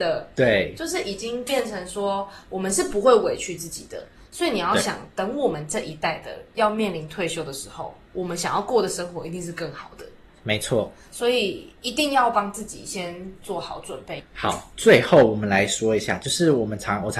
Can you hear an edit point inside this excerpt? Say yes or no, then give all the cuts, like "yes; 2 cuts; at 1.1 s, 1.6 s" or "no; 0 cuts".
no; 0 cuts